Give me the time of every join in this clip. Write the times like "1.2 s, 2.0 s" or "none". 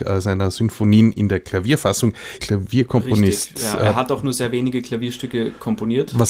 2.4 s